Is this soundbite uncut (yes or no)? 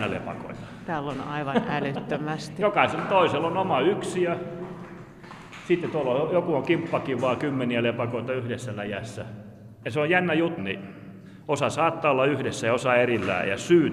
no